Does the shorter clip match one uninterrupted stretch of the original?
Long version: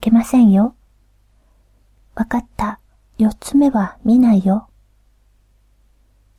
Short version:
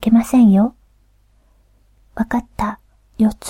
yes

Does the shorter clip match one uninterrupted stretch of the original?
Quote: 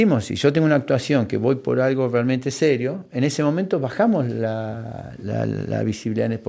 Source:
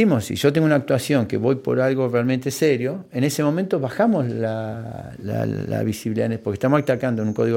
yes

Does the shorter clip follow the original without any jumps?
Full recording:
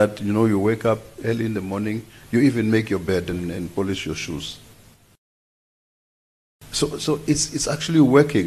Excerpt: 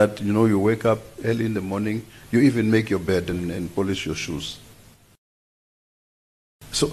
yes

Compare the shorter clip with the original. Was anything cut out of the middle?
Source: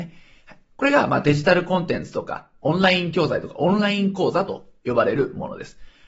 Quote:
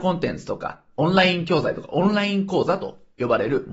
no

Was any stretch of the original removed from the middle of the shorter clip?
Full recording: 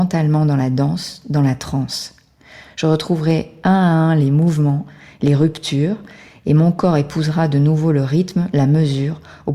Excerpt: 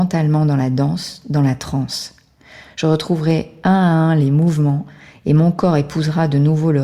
yes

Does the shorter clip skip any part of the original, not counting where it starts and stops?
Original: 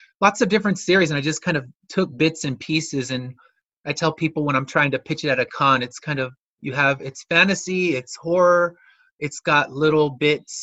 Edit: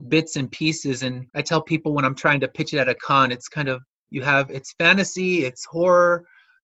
yes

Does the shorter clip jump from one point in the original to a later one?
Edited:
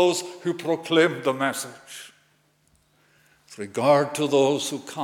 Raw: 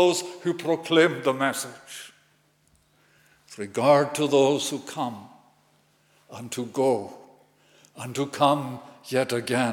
no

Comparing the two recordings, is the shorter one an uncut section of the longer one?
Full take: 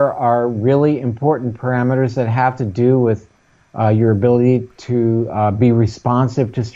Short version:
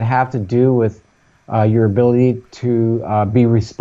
yes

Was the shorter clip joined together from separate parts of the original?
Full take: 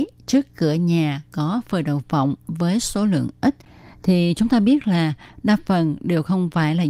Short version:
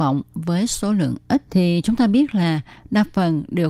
yes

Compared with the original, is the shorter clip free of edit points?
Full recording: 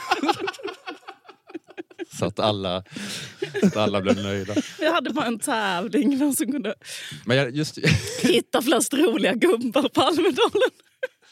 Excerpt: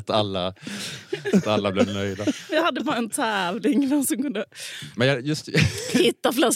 yes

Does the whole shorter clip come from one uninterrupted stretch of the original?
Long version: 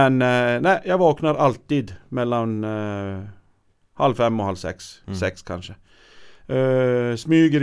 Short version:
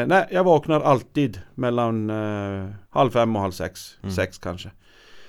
no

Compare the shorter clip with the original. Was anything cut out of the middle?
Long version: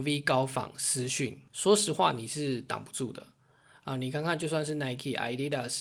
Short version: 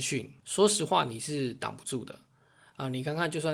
no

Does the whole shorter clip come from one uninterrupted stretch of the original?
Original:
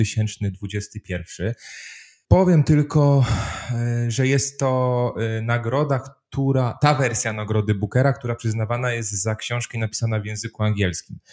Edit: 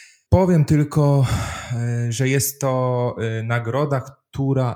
yes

